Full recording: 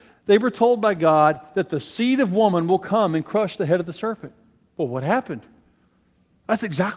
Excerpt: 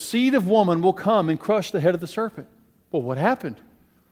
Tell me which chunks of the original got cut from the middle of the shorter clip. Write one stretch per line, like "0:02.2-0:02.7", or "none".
none